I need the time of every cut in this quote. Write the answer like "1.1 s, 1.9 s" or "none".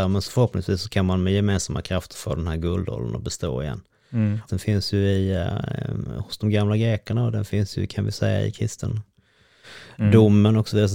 4.5 s